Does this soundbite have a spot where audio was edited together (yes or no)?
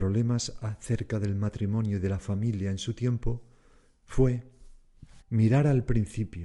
yes